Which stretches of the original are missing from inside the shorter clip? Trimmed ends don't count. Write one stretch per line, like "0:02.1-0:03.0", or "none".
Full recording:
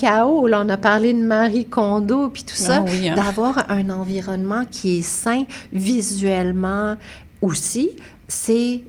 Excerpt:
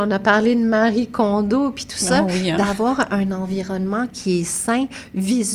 none